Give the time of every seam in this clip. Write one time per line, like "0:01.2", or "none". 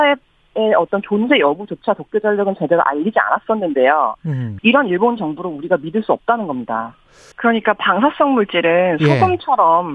0:04.6
0:07.3